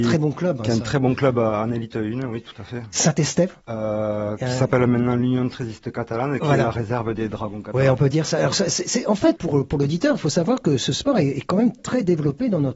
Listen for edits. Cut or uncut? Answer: cut